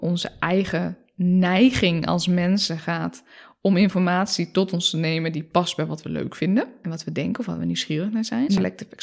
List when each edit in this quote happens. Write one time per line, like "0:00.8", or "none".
none

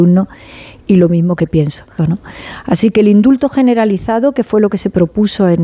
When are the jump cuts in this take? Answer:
0:02.0

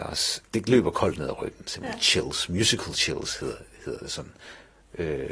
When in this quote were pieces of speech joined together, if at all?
none

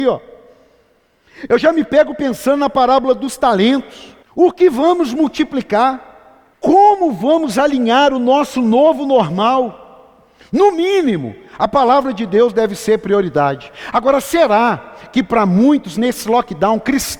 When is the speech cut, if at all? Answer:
0:04.2
0:06.5

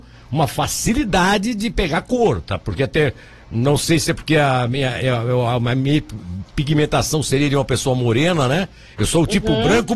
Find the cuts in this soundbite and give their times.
none

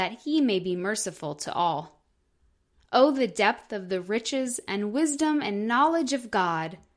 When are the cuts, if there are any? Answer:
none

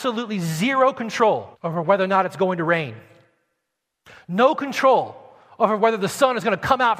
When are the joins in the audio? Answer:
0:01.5

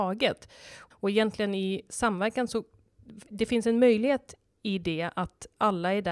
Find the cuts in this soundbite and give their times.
0:00.9

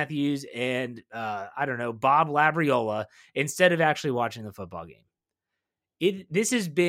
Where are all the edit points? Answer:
none

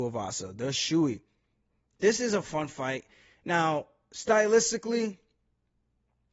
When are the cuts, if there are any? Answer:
none

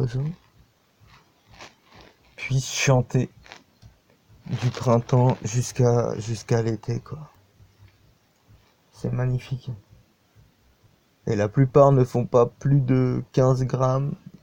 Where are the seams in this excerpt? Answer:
none

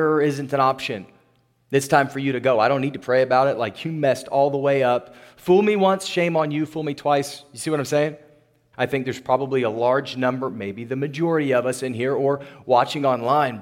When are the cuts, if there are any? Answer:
0:08.7

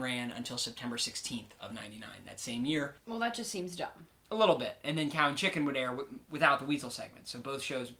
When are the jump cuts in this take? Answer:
0:03.0

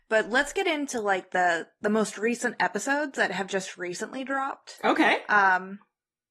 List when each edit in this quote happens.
none

